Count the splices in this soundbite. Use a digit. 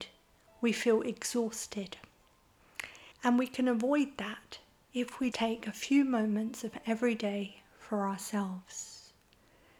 2